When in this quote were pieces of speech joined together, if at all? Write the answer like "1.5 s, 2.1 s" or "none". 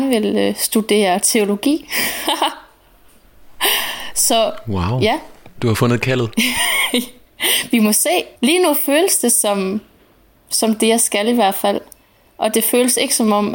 8.4 s